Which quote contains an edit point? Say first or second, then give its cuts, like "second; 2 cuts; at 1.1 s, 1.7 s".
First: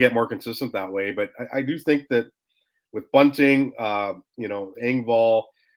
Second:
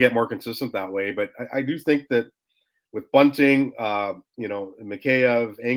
first; 1 cut; at 4.7 s